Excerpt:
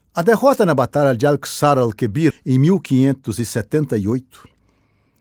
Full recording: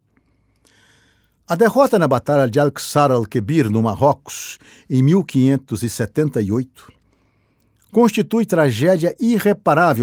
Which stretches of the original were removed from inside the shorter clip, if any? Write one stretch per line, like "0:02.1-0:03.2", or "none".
0:03.6-0:04.7